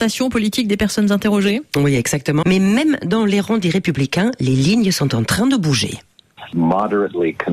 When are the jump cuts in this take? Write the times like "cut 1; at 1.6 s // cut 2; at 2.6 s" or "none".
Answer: cut 1; at 2.4 s